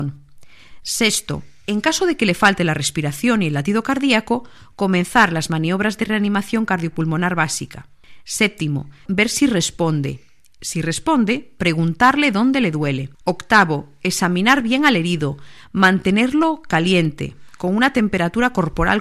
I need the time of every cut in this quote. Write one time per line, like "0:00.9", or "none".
0:09.1
0:13.1